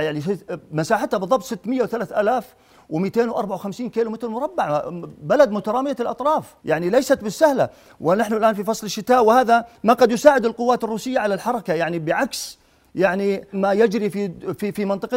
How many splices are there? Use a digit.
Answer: 2